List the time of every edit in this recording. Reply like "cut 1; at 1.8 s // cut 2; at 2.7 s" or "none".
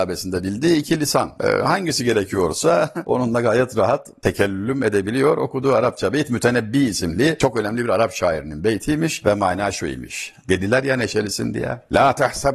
cut 1; at 1.4 s